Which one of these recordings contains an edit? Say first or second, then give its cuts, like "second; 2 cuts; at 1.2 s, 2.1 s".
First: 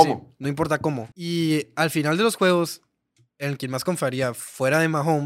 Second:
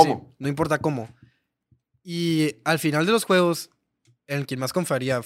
first; 1 cut; at 1.1 s